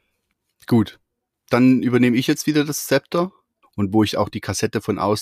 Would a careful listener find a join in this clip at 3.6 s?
yes; 1 cut; at 3.6 s

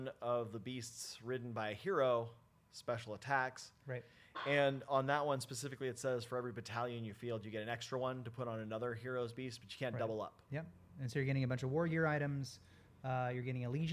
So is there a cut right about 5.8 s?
no; 1 cut; at 10.5 s

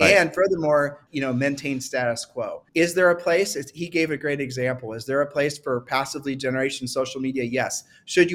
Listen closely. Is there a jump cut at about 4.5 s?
no; 2 cuts; at 1.1 s, 2.7 s

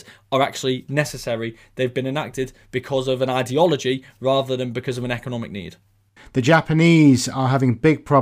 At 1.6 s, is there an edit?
no; 1 cut; at 6.2 s

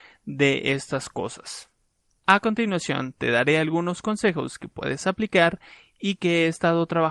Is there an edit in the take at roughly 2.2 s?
yes; 1 cut; at 2.2 s

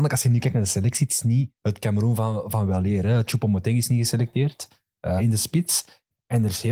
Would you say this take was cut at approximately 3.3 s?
no; 2 cuts; at 1.6 s, 5.2 s

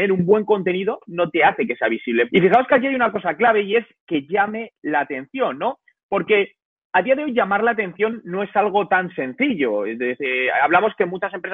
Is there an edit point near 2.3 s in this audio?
yes; 1 cut; at 2.3 s

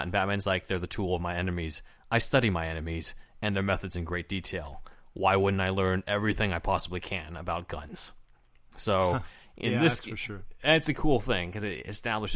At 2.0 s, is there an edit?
no; 0 cuts

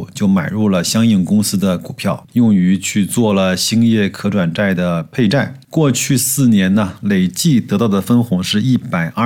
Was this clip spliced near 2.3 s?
yes; 1 cut; at 2.3 s

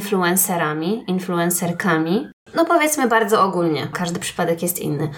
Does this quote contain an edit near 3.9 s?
yes; 2 cuts; at 2.5 s, 3.9 s

